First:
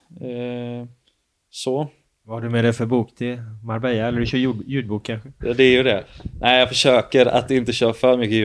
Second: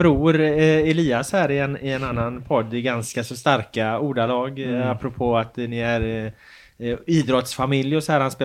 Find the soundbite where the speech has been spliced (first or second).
first